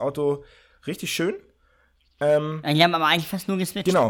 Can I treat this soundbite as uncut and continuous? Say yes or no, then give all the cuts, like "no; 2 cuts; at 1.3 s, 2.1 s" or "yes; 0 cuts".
yes; 0 cuts